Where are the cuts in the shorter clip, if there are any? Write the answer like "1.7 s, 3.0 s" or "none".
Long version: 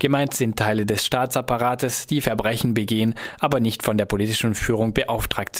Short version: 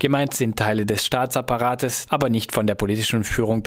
2.1 s

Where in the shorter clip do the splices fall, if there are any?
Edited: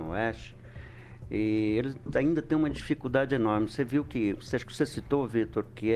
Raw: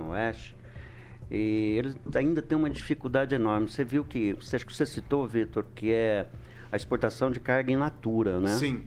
none

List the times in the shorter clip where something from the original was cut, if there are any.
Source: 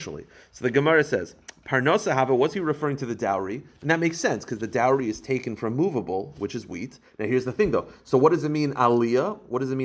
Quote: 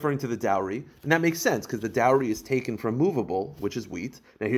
none

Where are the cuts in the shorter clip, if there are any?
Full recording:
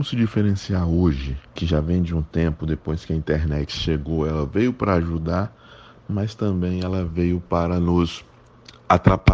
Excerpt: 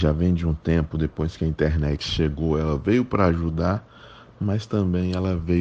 none

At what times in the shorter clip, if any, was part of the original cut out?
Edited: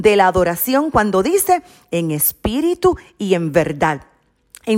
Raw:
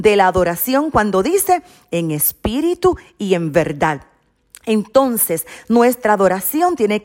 none

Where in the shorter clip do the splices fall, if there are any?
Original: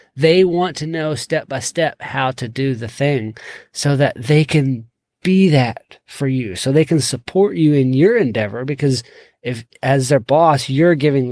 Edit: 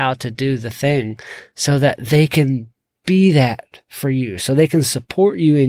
none

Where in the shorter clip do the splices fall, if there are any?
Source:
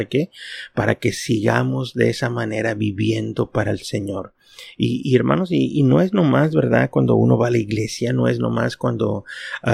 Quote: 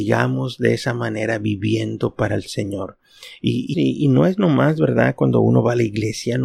3.7 s

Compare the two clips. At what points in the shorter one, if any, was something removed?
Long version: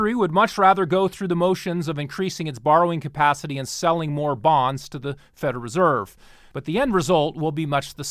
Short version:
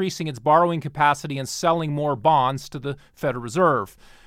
none

